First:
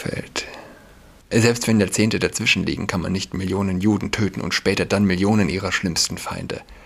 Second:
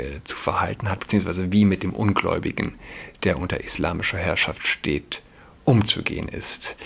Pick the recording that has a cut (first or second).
first